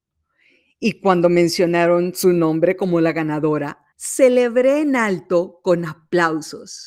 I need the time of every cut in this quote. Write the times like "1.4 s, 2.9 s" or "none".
3.9 s